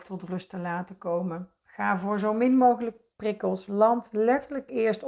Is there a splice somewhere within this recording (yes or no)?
no